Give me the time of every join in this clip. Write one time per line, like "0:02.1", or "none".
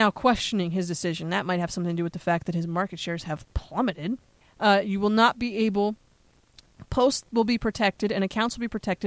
0:04.4